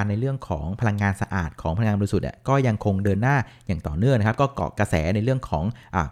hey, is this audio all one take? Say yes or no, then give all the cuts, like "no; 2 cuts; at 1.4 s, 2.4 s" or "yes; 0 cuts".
yes; 0 cuts